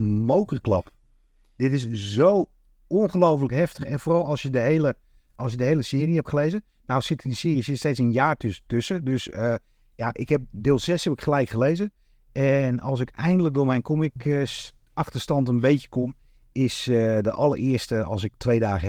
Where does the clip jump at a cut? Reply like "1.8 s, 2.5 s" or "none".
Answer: none